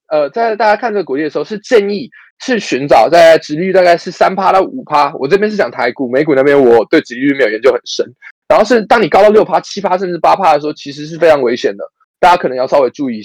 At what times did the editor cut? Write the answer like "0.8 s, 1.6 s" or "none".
none